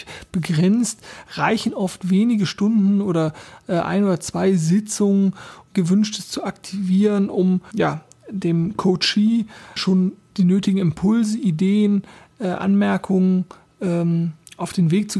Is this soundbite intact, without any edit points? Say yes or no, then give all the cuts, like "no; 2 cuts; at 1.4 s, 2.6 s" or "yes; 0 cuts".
no; 3 cuts; at 5.7 s, 7.7 s, 9.8 s